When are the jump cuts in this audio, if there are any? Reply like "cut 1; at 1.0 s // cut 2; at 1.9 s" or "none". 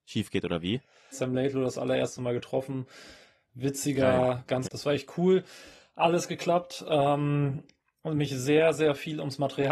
cut 1; at 1.1 s // cut 2; at 4.7 s